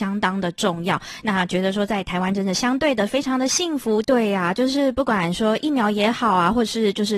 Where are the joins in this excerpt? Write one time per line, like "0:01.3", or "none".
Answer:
0:04.0